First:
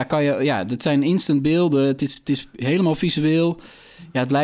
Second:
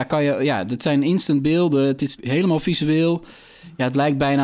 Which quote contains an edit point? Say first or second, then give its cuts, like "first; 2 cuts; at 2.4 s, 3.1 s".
second; 1 cut; at 2.2 s